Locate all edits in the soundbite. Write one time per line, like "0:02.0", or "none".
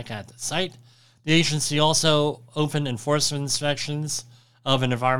none